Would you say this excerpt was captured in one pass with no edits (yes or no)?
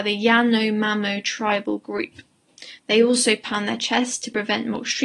yes